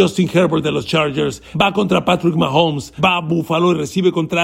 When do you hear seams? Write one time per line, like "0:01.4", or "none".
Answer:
0:01.5
0:03.0

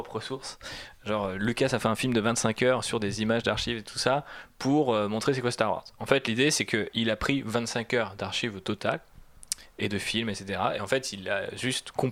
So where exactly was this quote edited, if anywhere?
none

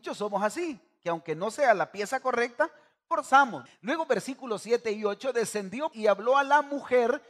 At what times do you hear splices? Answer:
0:03.7
0:05.9

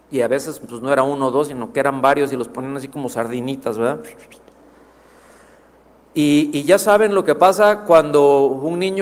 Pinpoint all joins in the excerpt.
none

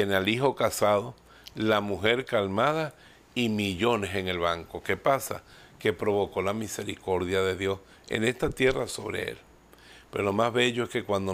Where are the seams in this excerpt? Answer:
none

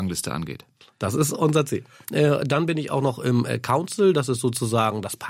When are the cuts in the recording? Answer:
0:02.0

